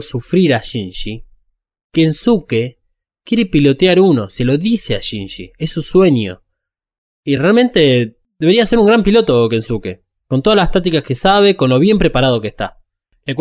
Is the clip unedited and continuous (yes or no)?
yes